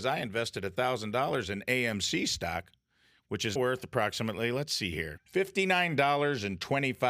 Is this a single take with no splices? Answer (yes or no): no